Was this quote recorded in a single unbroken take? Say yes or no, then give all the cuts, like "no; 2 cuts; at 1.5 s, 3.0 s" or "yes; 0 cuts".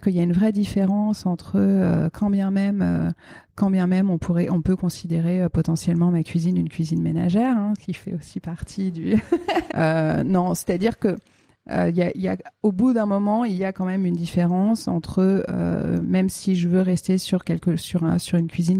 no; 1 cut; at 9.7 s